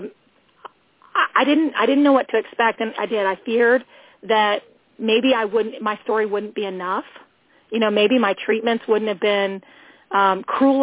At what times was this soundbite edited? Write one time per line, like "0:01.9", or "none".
0:03.0